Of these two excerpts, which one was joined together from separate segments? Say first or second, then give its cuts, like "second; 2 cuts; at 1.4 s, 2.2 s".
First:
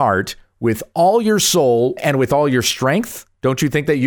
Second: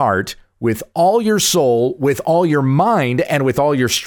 first; 1 cut; at 2.0 s